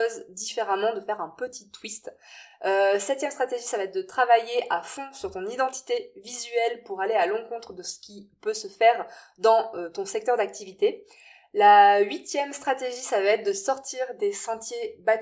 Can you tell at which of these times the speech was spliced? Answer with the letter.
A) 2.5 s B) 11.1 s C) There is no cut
C